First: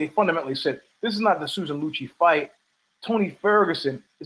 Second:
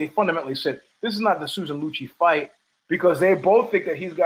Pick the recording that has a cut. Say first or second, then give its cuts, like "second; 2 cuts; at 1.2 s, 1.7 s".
second; 1 cut; at 2.8 s